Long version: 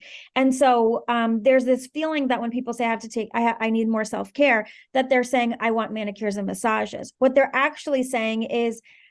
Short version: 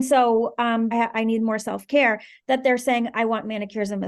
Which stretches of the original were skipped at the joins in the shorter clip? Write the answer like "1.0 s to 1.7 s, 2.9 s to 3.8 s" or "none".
1.4 s to 3.4 s